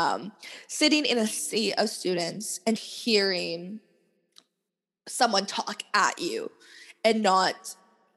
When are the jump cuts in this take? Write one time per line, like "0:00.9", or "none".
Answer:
0:02.8